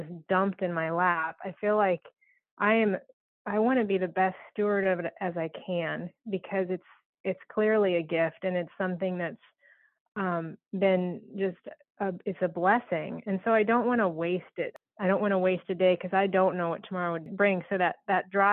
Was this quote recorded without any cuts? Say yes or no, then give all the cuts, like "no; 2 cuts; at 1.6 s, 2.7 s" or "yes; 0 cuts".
yes; 0 cuts